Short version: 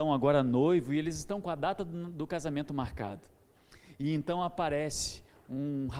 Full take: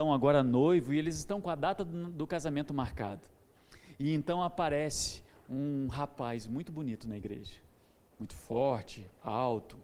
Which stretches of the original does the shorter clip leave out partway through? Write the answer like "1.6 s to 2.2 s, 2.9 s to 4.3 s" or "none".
none